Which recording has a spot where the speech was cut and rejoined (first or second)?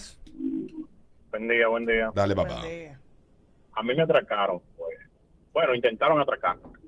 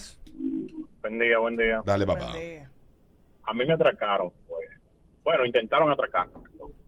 second